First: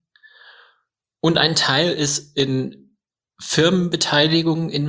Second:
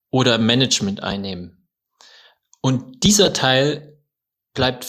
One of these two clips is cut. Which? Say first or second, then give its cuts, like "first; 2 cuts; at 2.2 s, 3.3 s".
second; 1 cut; at 2.5 s